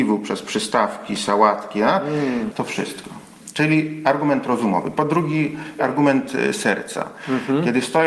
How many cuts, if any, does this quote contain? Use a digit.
2